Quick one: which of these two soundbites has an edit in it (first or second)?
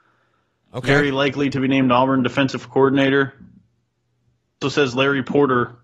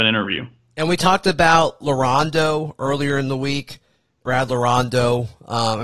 first